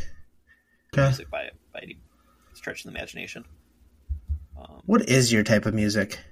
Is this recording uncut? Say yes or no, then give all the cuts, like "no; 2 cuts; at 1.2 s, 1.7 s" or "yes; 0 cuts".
no; 1 cut; at 0.9 s